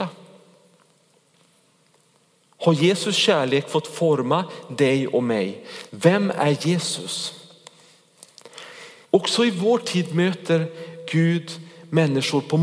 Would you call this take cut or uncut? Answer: cut